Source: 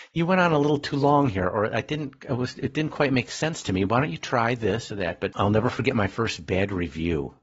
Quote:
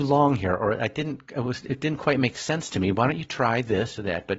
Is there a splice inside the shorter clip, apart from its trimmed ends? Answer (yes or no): no